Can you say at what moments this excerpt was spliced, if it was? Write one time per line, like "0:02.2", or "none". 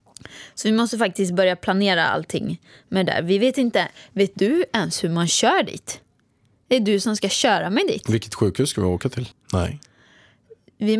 0:09.3